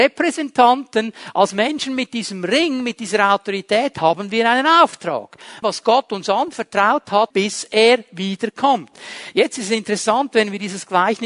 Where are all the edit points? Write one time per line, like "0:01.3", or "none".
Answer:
0:05.6
0:07.3